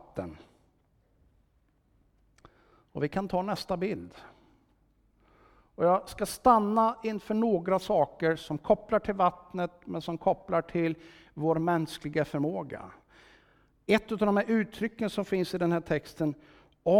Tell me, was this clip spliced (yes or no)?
no